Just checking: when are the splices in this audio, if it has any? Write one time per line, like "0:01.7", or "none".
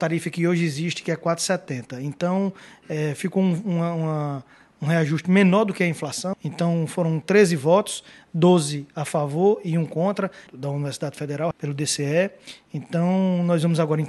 0:06.3
0:10.5
0:11.5